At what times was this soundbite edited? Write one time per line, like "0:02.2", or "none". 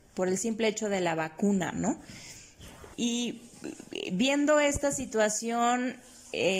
0:02.9

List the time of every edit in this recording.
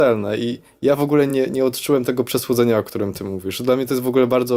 none

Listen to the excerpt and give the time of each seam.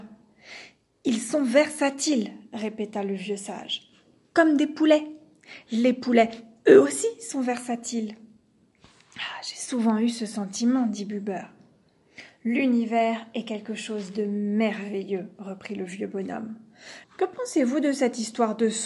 0:17.0

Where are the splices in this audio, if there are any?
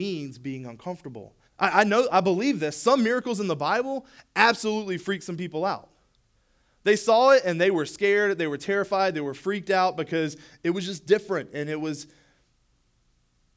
0:01.4

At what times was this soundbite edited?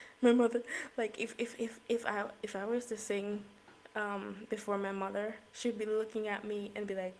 none

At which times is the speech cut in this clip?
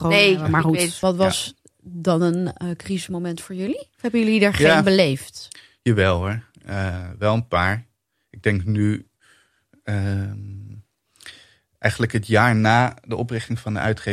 none

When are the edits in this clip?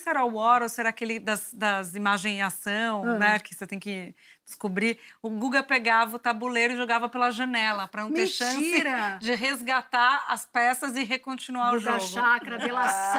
none

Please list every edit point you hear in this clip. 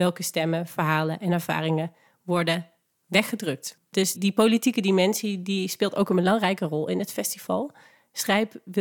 0:04.1

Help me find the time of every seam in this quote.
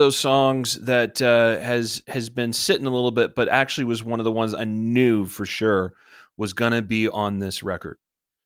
none

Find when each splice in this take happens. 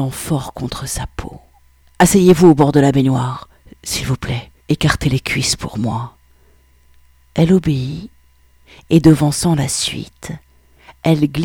0:01.8
0:04.6

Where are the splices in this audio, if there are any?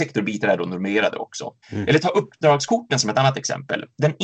0:01.6

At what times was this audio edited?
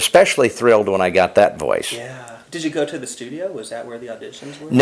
0:02.4

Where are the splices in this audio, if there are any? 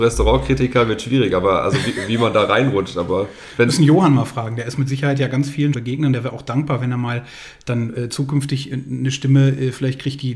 0:05.7

